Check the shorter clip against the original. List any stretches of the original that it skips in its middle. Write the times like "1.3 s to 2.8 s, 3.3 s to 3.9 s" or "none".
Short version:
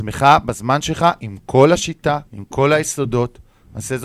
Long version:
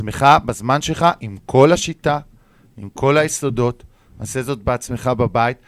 2.3 s to 2.7 s